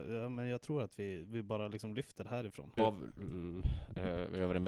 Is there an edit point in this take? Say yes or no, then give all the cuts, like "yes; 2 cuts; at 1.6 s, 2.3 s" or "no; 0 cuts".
yes; 1 cut; at 2.8 s